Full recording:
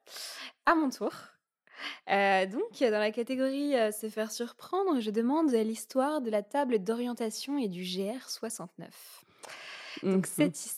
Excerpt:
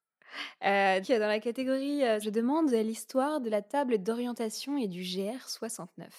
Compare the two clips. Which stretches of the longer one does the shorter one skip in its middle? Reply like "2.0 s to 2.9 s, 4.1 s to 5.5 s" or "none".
2.5 s to 2.7 s, 3.9 s to 5.0 s